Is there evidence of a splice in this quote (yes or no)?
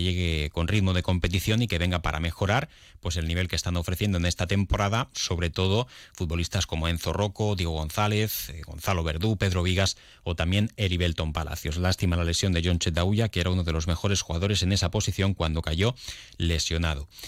no